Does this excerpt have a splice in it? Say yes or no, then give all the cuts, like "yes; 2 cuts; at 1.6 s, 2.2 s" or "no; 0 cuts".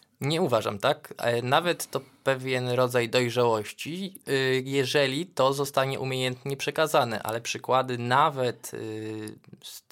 no; 0 cuts